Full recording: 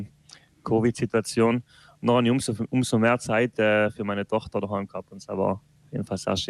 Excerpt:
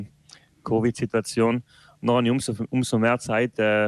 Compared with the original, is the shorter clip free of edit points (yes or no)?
yes